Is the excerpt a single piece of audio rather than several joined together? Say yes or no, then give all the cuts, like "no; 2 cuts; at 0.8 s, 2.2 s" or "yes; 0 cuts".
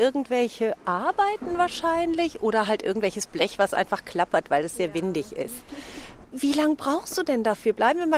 yes; 0 cuts